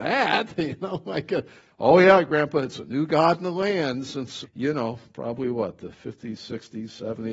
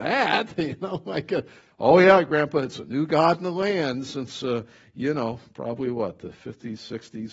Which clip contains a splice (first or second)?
first